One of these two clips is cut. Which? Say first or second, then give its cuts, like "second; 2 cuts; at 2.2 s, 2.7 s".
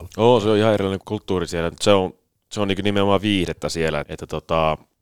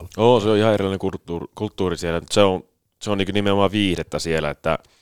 first; 2 cuts; at 1.0 s, 4.0 s